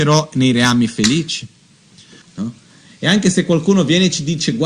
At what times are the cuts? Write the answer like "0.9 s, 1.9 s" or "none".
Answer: 2.2 s

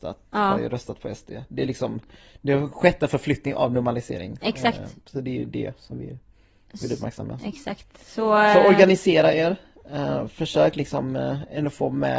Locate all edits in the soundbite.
none

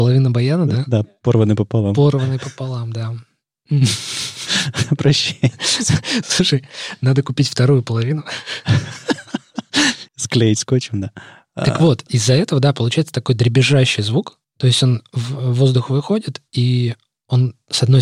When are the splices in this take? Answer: 10.1 s, 16.5 s

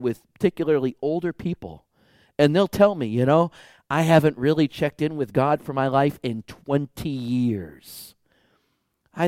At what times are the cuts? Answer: none

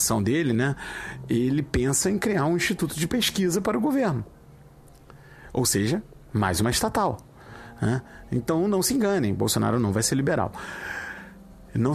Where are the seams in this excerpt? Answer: none

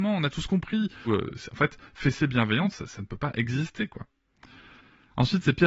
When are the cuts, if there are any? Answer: 1.1 s

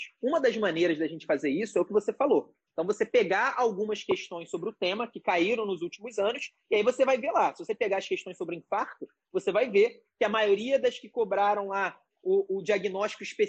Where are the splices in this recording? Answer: 2.7 s

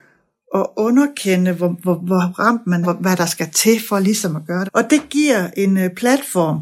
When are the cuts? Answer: 2.8 s, 4.7 s

